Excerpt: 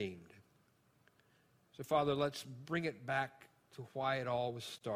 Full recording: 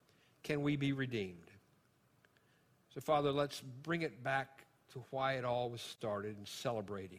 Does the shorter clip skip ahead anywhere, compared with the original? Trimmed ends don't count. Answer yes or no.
no